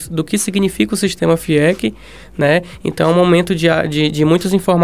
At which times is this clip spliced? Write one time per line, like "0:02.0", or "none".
none